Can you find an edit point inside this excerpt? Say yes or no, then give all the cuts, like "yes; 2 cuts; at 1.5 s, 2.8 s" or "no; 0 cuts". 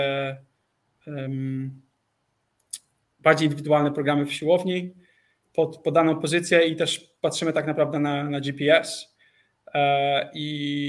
no; 0 cuts